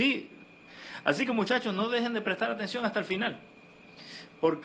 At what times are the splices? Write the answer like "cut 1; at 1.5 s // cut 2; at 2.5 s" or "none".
none